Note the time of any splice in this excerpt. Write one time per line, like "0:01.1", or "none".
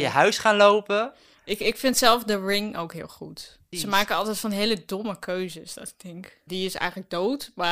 0:03.7
0:06.5